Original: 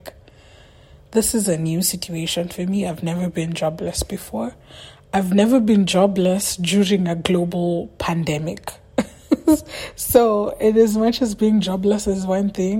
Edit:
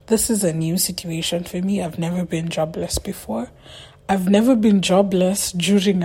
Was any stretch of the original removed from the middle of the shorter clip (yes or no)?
no